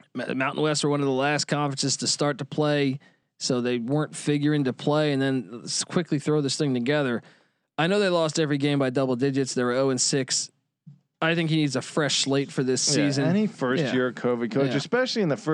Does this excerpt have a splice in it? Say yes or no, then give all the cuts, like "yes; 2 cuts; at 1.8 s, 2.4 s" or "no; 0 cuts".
no; 0 cuts